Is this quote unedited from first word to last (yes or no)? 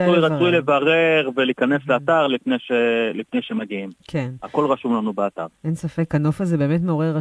yes